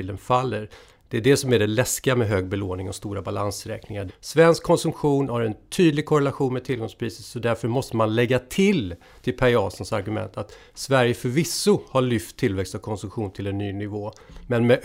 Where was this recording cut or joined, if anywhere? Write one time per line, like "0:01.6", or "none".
0:04.1